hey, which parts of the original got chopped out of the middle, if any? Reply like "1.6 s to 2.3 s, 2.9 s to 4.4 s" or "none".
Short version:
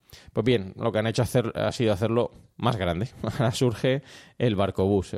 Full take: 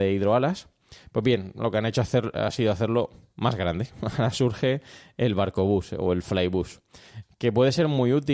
none